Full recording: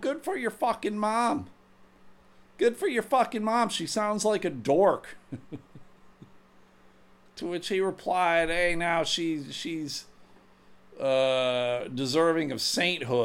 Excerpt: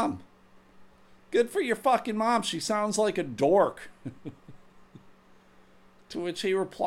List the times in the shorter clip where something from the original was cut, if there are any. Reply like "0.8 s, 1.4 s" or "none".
none